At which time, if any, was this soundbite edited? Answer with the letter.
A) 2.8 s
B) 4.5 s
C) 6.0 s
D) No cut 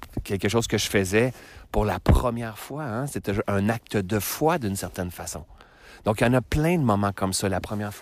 D